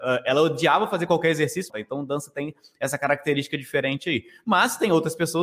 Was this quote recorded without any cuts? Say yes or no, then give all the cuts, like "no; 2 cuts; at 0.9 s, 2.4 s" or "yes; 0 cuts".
no; 1 cut; at 1.7 s